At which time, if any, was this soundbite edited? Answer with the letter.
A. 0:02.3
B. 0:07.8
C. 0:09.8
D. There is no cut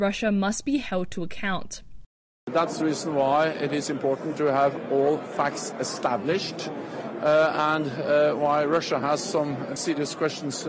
C